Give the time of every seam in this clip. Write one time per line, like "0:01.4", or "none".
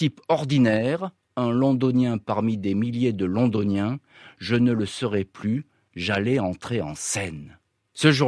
none